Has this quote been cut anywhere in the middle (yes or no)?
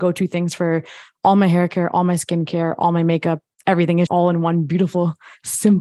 yes